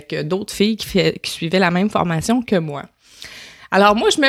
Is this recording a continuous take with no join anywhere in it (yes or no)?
yes